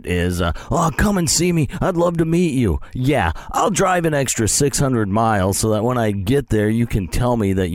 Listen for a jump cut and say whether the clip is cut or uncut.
uncut